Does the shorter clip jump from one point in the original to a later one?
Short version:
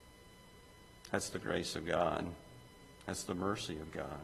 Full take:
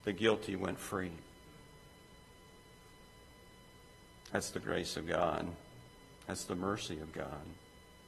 no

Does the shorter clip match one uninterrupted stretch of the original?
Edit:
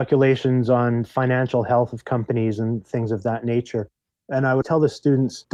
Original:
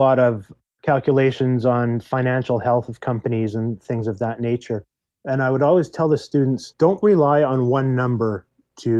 no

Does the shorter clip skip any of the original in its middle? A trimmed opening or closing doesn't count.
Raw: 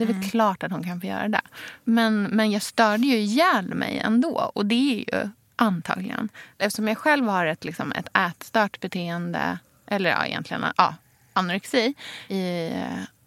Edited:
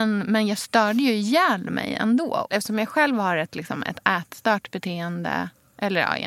yes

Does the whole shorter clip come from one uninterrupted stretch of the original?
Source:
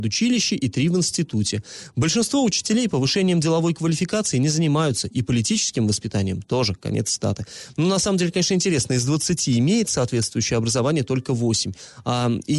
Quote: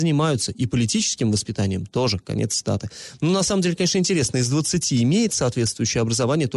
yes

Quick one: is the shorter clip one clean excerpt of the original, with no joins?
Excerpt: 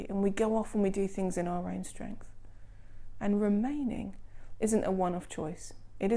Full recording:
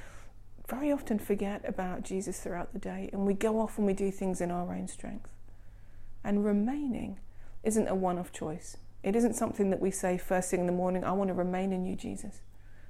yes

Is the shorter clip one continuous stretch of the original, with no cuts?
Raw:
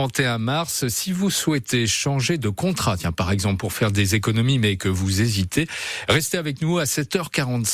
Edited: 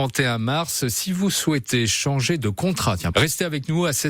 no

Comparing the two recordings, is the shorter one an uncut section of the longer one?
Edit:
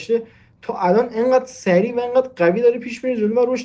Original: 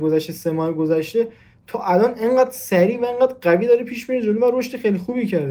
yes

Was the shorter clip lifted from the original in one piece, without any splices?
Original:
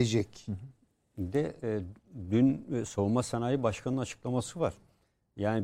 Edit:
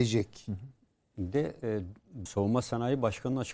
no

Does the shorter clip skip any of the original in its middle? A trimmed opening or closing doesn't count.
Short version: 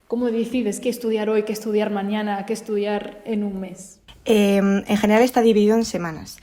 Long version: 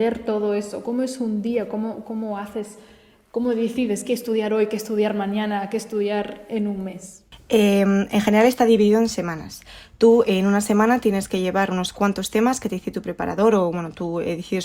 no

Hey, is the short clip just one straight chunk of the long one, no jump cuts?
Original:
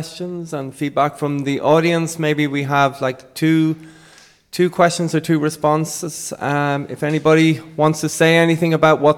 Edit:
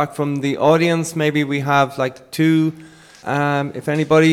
no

